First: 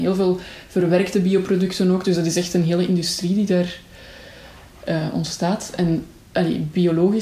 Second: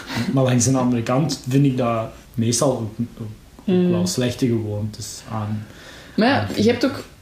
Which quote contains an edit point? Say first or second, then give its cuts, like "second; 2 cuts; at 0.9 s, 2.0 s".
second; 1 cut; at 2.2 s